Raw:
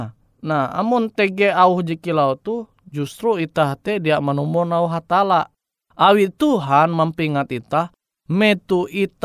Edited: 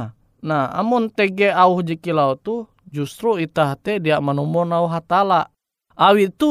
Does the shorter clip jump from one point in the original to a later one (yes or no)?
no